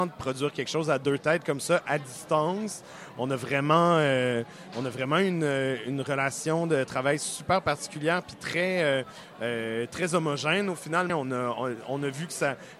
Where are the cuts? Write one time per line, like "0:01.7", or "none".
0:11.1